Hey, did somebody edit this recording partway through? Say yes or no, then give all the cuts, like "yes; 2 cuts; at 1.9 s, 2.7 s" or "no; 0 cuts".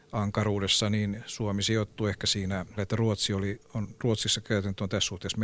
yes; 1 cut; at 2.8 s